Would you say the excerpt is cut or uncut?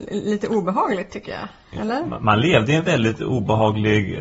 uncut